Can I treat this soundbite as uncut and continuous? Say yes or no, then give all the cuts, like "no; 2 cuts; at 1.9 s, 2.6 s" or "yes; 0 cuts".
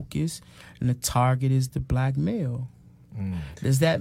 yes; 0 cuts